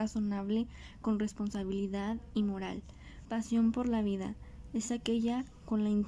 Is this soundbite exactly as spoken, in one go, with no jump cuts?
no; 1 cut; at 3.3 s

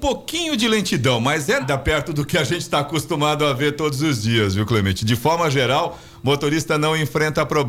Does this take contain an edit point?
yes; 1 cut; at 1.6 s

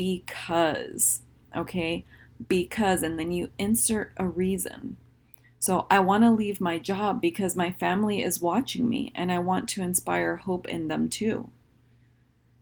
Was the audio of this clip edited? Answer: no; 0 cuts

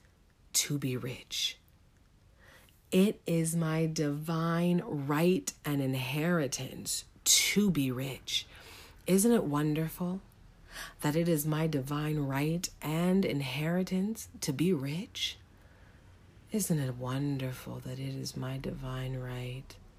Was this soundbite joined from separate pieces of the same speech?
no; 0 cuts

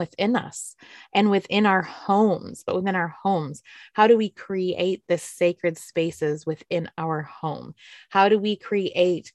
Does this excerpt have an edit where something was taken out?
yes; 1 cut; at 2.6 s

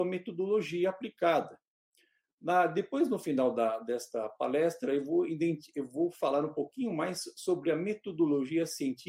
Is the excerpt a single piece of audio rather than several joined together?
yes; 0 cuts

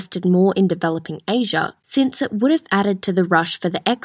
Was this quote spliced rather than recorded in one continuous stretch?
yes; 1 cut; at 1.8 s

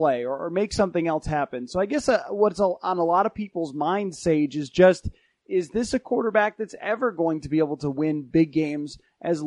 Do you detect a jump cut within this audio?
no; 0 cuts

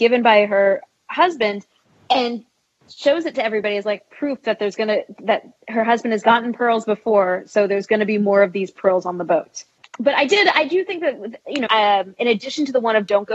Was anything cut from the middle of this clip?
yes; 2 cuts; at 9.8 s, 11.7 s

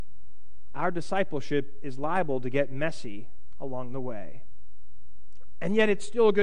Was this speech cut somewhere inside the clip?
no; 0 cuts

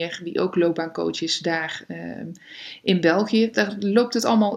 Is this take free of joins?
yes; 0 cuts

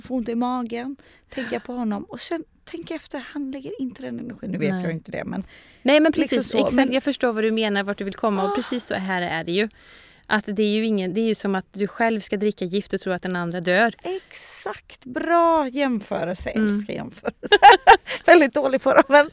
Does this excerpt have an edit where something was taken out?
yes; 1 cut; at 17.5 s

